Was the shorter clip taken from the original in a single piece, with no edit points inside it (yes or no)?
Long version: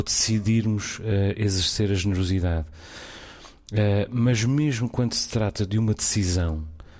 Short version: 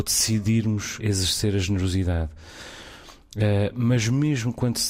no